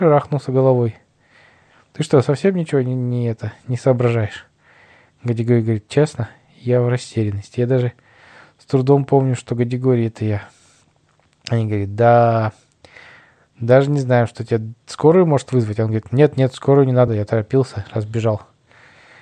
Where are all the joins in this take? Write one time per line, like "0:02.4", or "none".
0:17.1

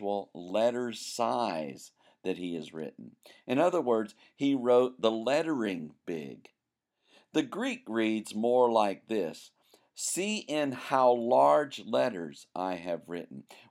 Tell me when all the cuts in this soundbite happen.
none

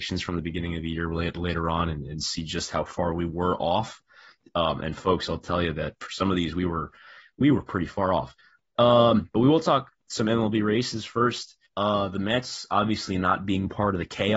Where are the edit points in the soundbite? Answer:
0:11.7

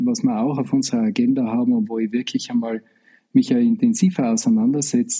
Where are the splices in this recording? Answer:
none

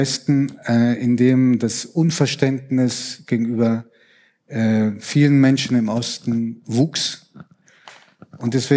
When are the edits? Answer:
none

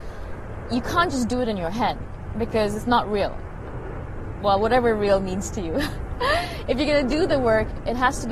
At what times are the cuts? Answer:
none

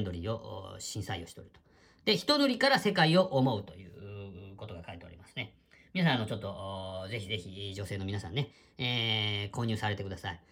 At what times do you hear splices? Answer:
none

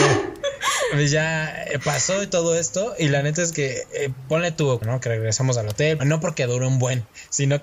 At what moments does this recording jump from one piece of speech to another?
0:04.8
0:06.0

